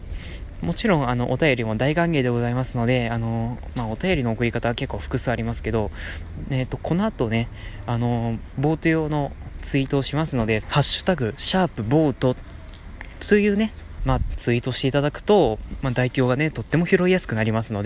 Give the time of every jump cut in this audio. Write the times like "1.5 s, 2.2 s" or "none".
10.6 s, 14.0 s